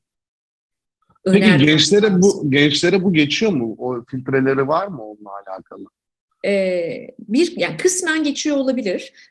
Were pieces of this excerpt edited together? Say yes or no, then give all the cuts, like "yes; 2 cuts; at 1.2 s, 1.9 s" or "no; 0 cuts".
no; 0 cuts